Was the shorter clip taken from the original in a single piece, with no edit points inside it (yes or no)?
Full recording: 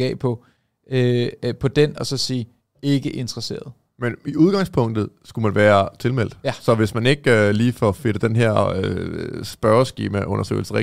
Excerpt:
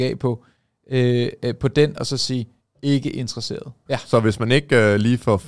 no